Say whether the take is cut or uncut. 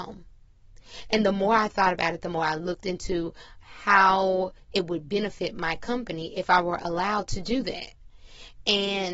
cut